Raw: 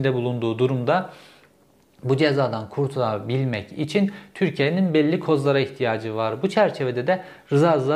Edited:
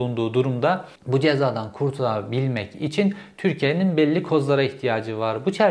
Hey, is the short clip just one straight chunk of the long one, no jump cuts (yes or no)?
no